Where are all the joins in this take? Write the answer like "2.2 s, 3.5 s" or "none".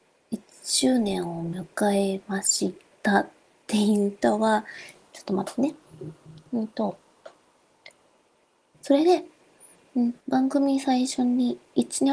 8.7 s, 10.2 s